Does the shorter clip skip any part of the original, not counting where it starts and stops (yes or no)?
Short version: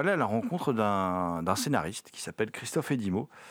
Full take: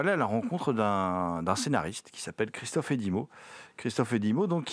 no